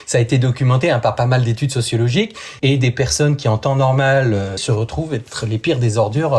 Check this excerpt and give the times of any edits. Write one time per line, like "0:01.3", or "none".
0:02.6
0:04.6